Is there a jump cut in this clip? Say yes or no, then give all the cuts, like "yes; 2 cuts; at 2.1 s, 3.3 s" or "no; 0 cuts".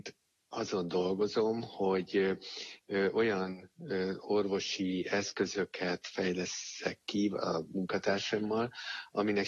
no; 0 cuts